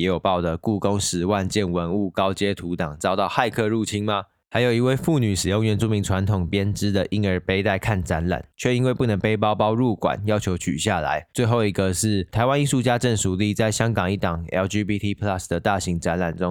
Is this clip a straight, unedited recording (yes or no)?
yes